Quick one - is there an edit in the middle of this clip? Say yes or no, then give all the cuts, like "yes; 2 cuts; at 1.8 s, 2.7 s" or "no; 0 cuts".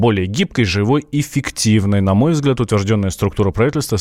no; 0 cuts